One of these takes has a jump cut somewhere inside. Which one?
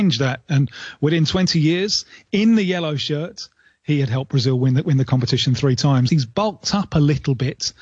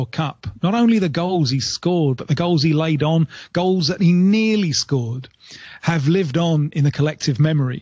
first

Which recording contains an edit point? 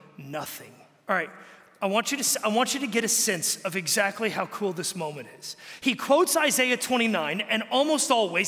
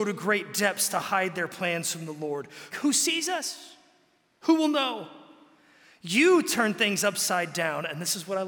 second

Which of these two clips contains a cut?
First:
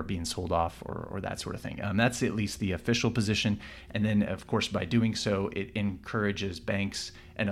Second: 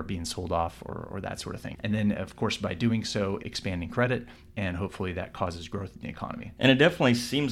second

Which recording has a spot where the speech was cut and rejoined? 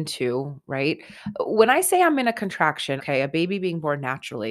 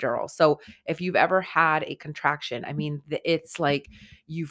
first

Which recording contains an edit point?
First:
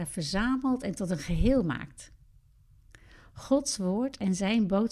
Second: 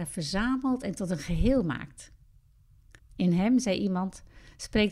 second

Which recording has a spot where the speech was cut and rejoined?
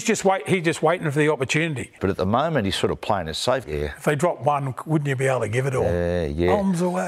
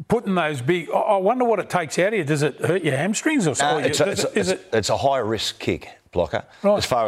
first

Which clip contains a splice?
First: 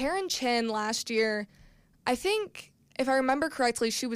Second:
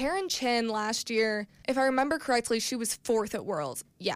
second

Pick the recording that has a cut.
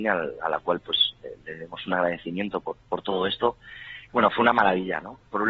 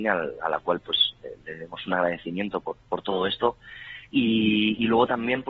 first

